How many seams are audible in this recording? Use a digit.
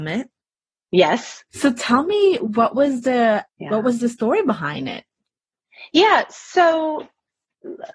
2